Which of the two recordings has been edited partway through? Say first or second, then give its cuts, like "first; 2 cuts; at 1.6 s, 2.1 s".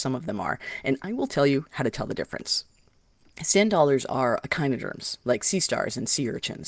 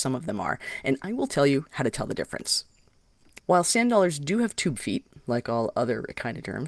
second; 1 cut; at 3.4 s